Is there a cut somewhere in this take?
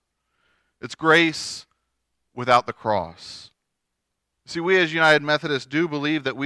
yes; 1 cut; at 4.3 s

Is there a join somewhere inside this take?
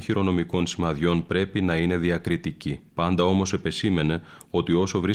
yes; 1 cut; at 2.9 s

